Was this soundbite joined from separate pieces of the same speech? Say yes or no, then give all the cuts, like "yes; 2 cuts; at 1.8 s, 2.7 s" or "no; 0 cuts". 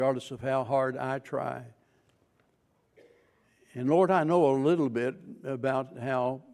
no; 0 cuts